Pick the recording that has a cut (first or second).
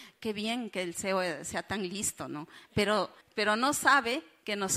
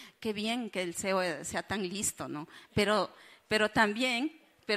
first